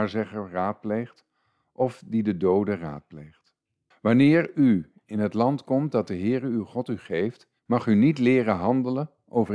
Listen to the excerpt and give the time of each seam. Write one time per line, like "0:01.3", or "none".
0:03.9
0:07.6